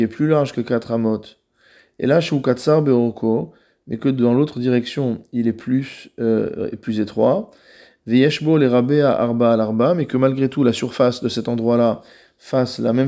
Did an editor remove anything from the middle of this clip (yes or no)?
no